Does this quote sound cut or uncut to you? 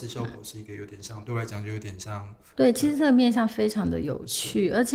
cut